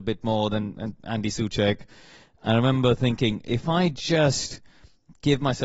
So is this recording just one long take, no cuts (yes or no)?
yes